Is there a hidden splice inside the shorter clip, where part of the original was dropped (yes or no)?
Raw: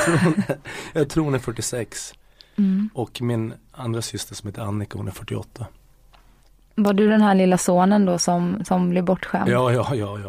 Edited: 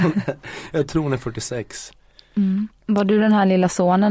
yes